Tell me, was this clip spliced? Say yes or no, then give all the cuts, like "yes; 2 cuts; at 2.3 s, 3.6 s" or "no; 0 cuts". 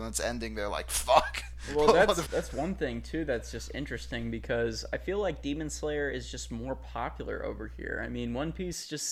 yes; 1 cut; at 2.2 s